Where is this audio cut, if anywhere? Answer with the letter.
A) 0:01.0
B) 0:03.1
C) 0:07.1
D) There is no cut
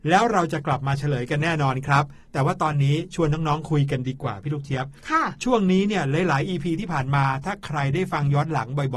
D